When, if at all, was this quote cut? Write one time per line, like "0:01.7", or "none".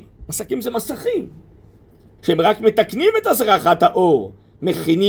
0:02.2